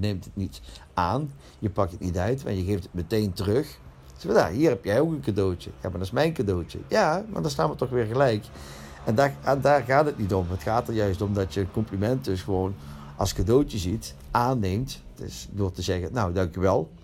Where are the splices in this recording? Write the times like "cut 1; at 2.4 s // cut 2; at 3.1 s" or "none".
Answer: none